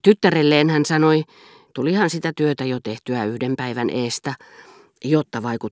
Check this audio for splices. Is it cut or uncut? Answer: cut